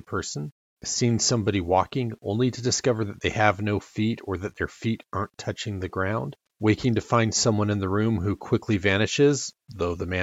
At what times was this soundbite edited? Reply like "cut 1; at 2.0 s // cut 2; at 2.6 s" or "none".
cut 1; at 6.5 s